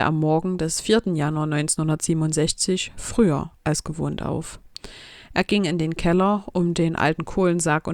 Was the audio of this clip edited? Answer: no; 0 cuts

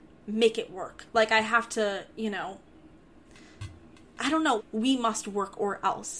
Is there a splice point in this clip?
yes; 1 cut; at 4.6 s

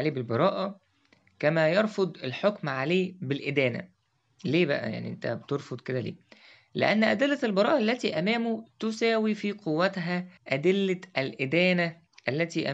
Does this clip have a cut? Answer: yes; 1 cut; at 10.4 s

